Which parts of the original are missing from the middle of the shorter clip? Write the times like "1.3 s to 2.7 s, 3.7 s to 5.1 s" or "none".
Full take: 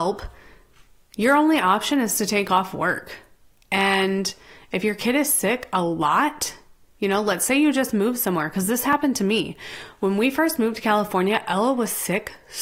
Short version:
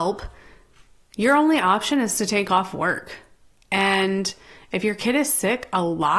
none